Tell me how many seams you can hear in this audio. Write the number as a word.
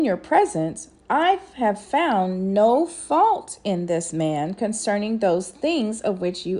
zero